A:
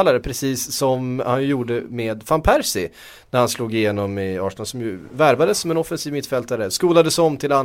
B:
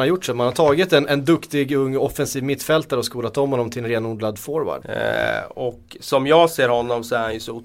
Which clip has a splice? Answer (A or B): B